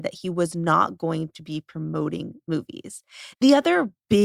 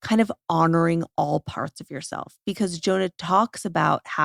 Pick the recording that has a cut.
first; 1 cut; at 3.3 s

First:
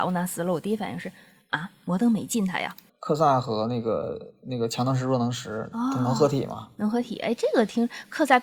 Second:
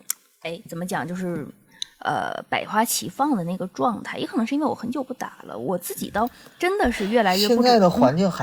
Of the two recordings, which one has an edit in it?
first; 1 cut; at 2.9 s

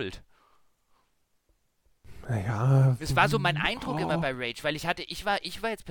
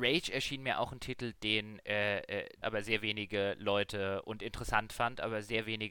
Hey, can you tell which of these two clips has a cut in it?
second; 1 cut; at 2.6 s

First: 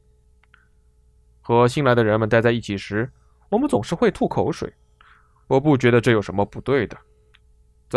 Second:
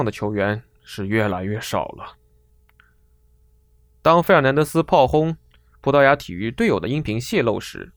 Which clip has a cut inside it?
first; 1 cut; at 1.3 s

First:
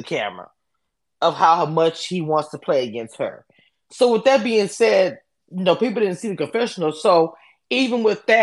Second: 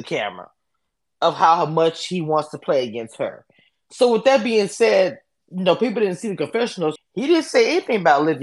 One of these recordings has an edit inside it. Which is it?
second; 1 cut; at 7.0 s

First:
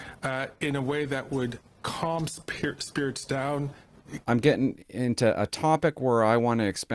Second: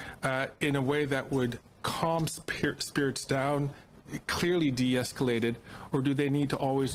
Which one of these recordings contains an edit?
first; 1 cut; at 4.2 s

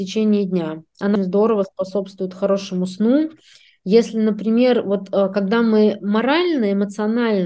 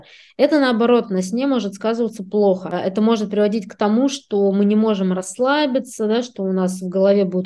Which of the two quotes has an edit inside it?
first; 1 cut; at 1.2 s

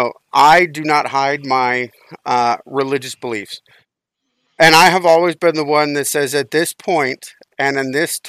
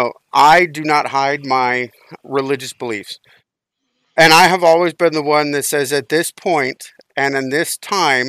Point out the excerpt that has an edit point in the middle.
second; 1 cut; at 2.2 s

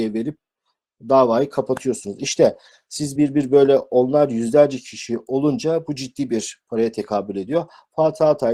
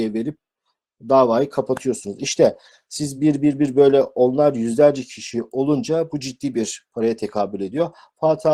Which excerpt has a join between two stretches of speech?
first; 1 cut; at 3.2 s

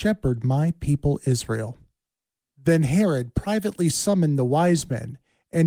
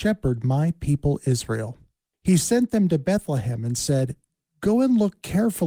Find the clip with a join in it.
second; 1 cut; at 2.1 s

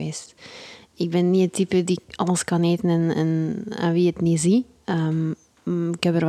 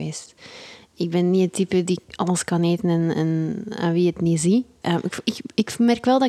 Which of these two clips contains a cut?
second; 1 cut; at 4.8 s

